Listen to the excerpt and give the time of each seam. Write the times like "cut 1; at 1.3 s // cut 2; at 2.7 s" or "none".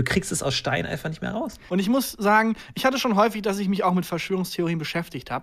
cut 1; at 1.7 s